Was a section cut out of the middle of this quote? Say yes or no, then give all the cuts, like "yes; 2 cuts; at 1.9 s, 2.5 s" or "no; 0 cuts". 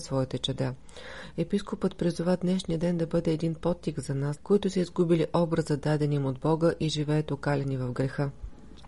yes; 1 cut; at 4.4 s